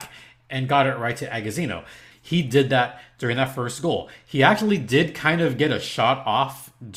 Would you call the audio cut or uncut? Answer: cut